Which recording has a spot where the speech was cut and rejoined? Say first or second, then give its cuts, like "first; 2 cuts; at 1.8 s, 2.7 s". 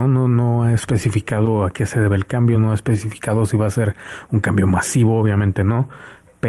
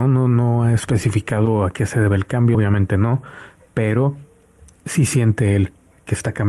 second; 1 cut; at 2.5 s